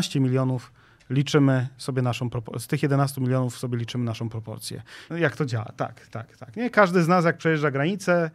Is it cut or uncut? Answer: cut